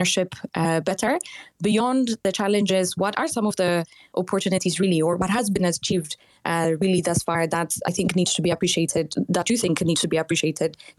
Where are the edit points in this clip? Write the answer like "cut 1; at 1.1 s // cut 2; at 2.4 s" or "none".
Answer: none